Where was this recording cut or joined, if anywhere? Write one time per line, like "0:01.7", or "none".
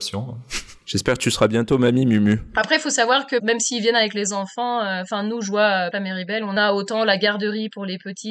0:05.9